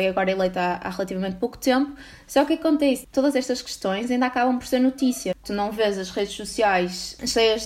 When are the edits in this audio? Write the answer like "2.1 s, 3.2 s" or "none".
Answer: none